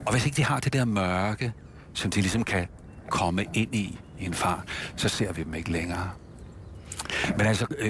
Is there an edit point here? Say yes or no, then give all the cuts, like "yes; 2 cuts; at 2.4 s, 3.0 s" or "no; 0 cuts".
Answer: no; 0 cuts